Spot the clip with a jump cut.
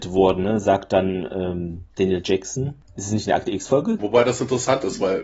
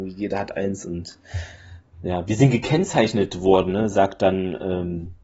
first; 2 cuts; at 1.9 s, 4.0 s

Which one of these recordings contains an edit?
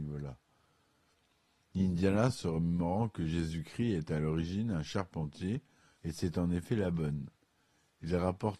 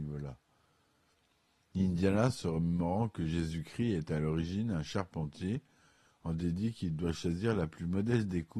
first; 1 cut; at 5.9 s

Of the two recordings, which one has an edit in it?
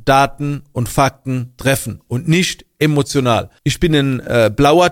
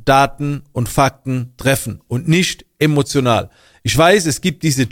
first; 1 cut; at 3.6 s

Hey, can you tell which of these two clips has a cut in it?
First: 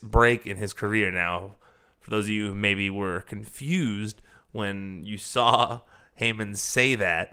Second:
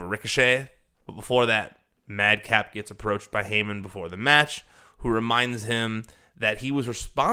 second; 1 cut; at 0.9 s

